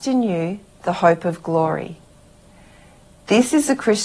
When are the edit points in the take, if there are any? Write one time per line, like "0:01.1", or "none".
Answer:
none